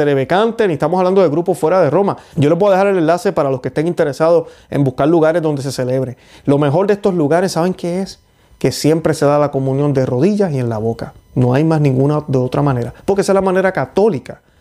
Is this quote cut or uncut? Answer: cut